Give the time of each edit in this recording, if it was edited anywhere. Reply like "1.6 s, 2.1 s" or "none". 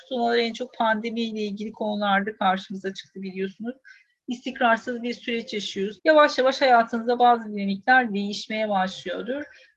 6.0 s

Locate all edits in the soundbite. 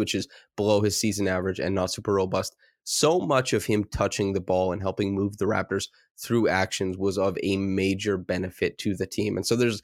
none

